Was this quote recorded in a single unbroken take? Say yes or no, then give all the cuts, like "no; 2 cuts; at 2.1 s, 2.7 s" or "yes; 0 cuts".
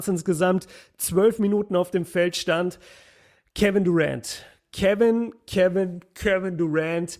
yes; 0 cuts